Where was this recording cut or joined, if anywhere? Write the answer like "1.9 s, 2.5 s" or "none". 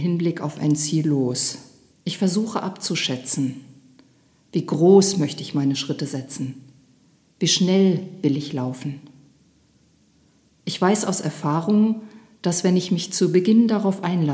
1.9 s